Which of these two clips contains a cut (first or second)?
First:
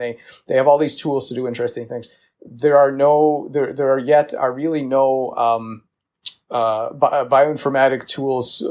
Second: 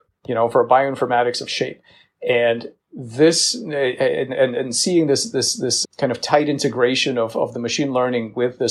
second